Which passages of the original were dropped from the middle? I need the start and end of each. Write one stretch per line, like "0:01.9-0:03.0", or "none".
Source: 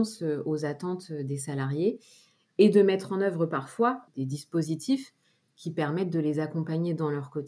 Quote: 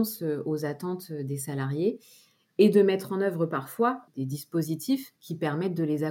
0:05.2-0:05.5